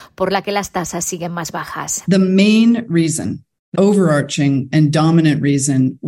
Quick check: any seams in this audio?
yes; 1 cut; at 3.7 s

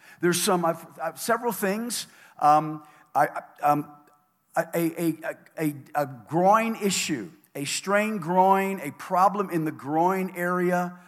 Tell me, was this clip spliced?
yes; 1 cut; at 5.5 s

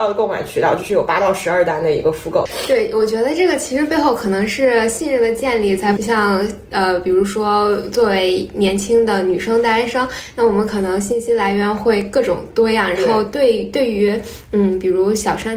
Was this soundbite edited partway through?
yes; 1 cut; at 6.0 s

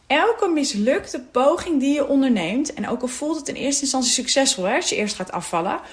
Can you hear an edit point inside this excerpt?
no; 0 cuts

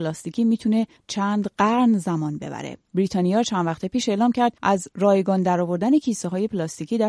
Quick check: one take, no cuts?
no; 1 cut; at 4.6 s

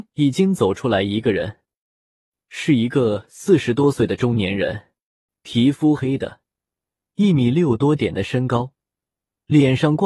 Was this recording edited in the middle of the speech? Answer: yes; 1 cut; at 6.0 s

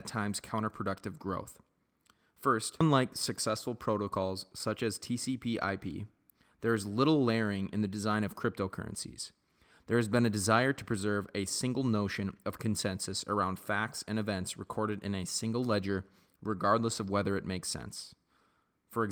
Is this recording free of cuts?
yes; 0 cuts

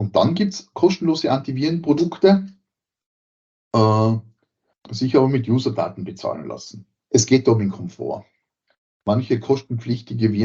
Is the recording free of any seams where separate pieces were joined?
no; 2 cuts; at 4.7 s, 7.0 s

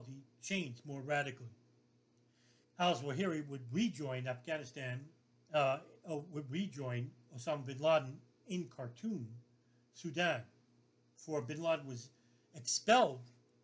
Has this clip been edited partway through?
yes; 1 cut; at 2.6 s

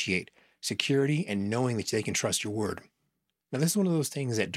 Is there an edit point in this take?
yes; 1 cut; at 3.5 s

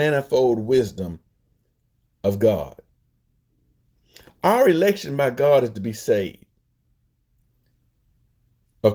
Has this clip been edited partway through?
no; 0 cuts

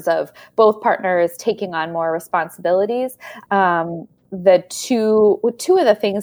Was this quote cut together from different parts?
yes; 1 cut; at 3.5 s

